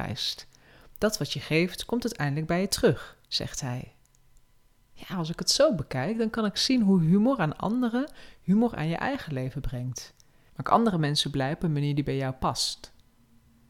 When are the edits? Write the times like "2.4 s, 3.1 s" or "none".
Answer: 3.2 s, 10.5 s